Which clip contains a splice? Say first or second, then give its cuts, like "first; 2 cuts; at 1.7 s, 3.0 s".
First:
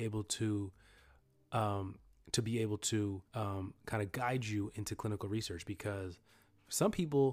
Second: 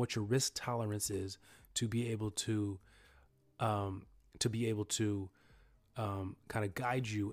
first; 1 cut; at 3.3 s